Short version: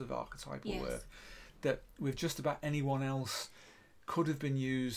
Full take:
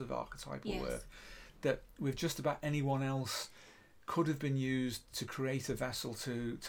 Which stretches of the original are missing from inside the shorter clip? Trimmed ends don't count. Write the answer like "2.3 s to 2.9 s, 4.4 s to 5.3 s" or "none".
none